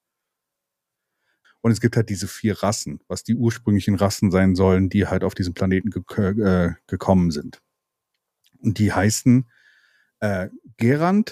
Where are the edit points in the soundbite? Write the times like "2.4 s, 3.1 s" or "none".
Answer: 1.4 s